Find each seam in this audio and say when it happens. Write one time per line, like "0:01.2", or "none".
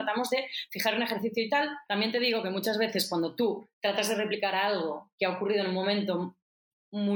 0:01.9